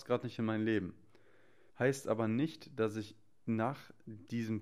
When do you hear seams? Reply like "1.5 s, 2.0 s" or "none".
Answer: 1.7 s